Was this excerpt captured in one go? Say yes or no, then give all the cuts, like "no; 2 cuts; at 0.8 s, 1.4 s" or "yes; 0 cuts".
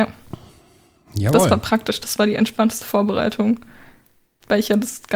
yes; 0 cuts